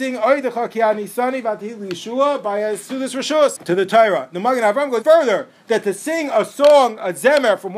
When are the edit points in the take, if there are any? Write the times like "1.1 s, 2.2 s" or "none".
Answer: 3.6 s, 5.0 s